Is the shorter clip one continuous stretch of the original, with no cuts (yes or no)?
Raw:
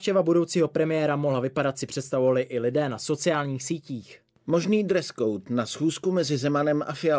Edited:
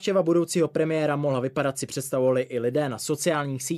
yes